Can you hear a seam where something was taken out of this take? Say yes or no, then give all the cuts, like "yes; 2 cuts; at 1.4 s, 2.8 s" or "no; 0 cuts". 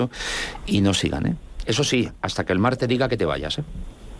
yes; 1 cut; at 1.6 s